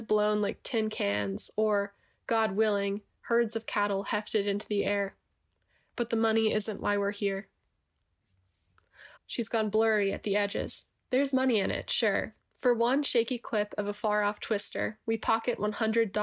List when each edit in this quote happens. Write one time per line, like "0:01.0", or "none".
0:09.2
0:11.0